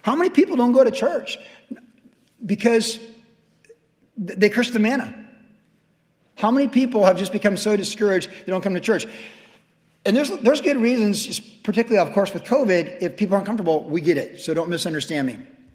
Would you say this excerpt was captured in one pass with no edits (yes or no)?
yes